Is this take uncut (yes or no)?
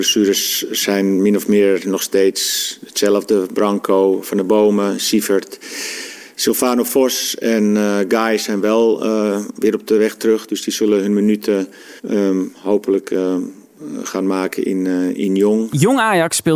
no